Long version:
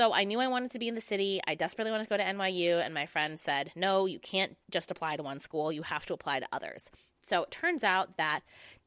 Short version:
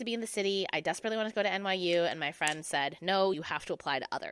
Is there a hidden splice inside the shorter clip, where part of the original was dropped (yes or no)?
yes